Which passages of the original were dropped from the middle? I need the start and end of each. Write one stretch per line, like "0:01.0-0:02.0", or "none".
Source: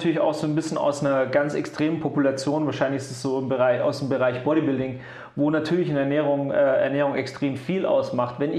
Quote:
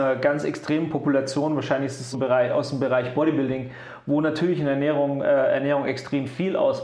0:03.2-0:03.4